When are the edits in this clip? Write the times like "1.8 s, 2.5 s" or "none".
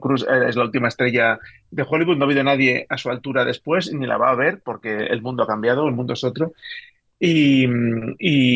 none